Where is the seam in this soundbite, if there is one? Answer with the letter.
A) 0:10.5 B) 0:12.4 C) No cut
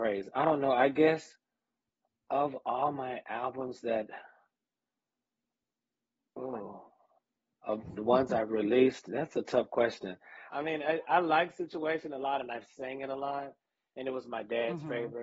A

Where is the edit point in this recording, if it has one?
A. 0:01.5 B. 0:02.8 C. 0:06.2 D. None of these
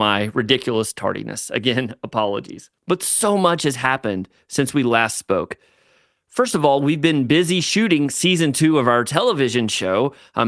B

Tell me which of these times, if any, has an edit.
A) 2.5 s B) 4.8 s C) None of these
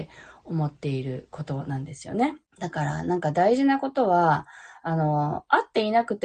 A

